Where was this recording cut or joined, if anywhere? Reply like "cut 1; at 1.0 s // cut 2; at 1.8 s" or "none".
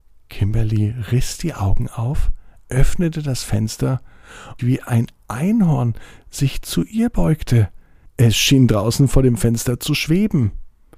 cut 1; at 4.6 s